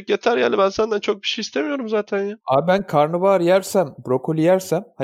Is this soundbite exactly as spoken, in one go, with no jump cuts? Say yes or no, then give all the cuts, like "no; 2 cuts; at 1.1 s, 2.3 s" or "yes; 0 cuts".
yes; 0 cuts